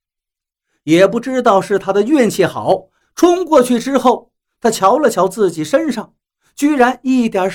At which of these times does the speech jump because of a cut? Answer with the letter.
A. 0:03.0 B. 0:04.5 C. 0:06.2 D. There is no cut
A